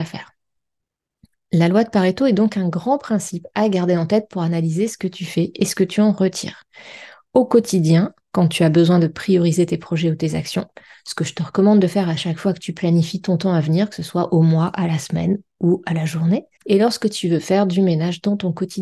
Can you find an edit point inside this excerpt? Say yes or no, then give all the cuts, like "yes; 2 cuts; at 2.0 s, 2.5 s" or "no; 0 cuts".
yes; 1 cut; at 16.6 s